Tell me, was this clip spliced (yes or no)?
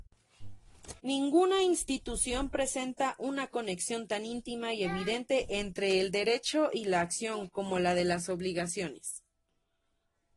yes